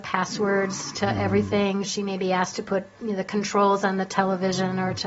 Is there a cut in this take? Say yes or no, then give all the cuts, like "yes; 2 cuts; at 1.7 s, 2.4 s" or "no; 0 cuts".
no; 0 cuts